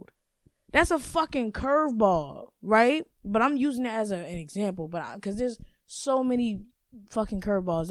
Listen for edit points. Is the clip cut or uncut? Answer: uncut